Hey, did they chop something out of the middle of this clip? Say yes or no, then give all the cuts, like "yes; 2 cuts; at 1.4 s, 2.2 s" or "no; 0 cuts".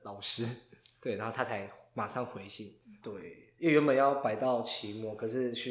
yes; 1 cut; at 3.0 s